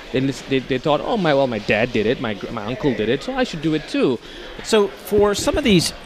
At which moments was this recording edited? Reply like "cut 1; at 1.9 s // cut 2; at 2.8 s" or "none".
cut 1; at 2.5 s // cut 2; at 4.6 s